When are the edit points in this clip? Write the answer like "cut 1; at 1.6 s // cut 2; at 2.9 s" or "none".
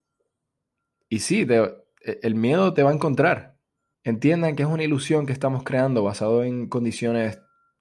cut 1; at 3.9 s